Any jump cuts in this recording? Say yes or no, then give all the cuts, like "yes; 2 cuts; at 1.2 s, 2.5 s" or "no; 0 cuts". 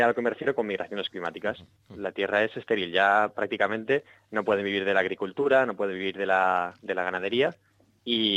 yes; 1 cut; at 1.8 s